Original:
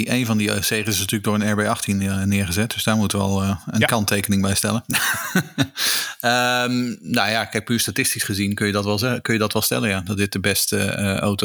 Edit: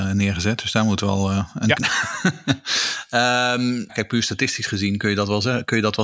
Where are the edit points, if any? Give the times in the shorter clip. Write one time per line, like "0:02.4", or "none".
0:01.7
0:03.9